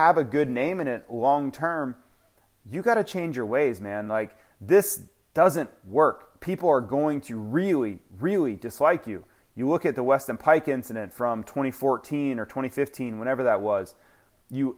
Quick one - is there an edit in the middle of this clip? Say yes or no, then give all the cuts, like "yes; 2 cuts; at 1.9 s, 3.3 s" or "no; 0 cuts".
no; 0 cuts